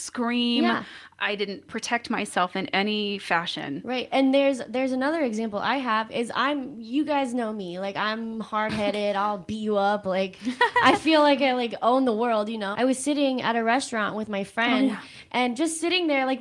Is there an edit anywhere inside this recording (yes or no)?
yes